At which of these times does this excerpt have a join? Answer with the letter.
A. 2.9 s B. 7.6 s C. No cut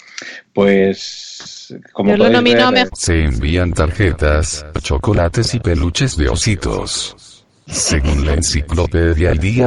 A